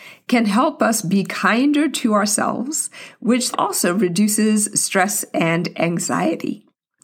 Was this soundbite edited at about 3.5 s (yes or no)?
yes